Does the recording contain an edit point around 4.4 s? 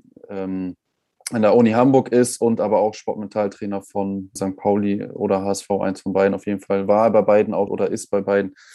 yes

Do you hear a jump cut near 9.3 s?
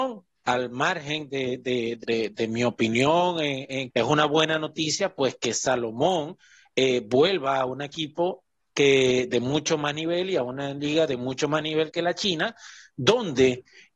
no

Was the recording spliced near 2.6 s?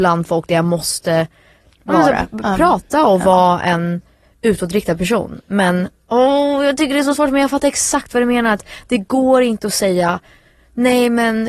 no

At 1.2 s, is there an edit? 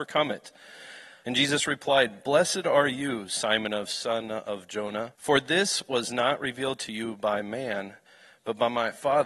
yes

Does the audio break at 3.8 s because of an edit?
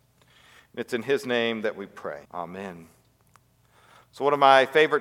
no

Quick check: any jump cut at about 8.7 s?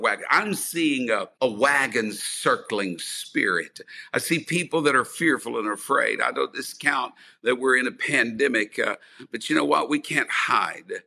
no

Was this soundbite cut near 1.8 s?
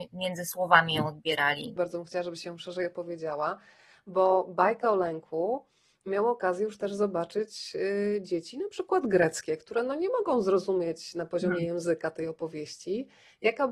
yes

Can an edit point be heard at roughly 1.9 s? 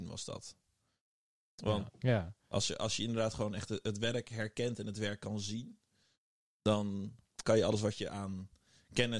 yes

